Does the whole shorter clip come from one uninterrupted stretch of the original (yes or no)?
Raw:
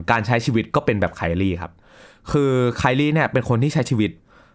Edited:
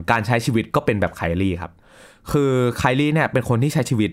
yes